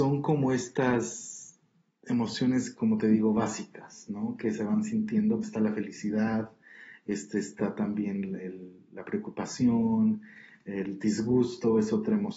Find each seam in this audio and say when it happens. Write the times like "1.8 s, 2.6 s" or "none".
5.4 s